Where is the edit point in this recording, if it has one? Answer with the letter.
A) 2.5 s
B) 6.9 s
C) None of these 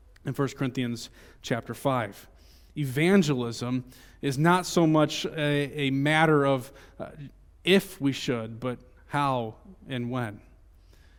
C